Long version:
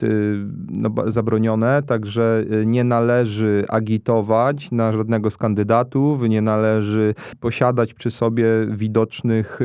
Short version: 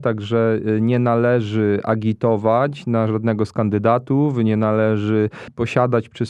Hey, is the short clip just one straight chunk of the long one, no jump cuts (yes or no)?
yes